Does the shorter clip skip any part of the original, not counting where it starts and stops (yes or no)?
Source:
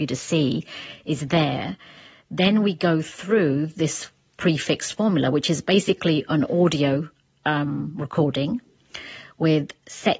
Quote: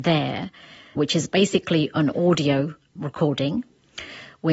yes